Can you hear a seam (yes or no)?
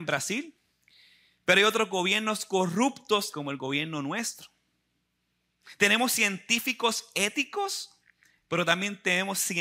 yes